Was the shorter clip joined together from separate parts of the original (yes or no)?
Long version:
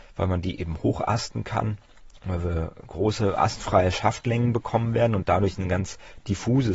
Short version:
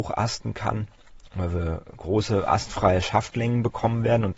no